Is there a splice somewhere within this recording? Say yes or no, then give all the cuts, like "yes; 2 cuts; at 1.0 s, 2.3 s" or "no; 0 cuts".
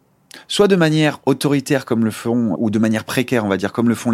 yes; 1 cut; at 2.6 s